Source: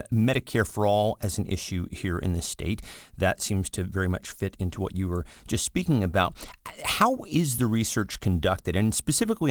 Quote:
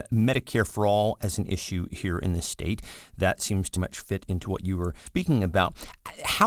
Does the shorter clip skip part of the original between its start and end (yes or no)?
yes